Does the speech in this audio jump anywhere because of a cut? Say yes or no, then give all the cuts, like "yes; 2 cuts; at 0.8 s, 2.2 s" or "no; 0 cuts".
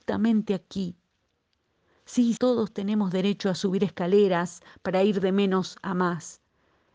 yes; 1 cut; at 2.4 s